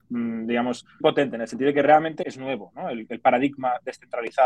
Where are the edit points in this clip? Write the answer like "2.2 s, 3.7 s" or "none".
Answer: 1.0 s, 2.2 s